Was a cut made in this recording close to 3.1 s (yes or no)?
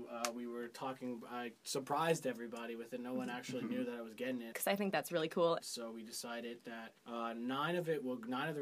no